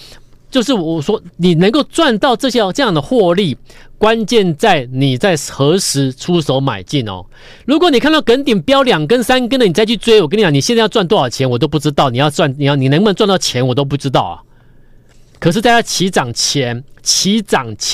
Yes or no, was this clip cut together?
no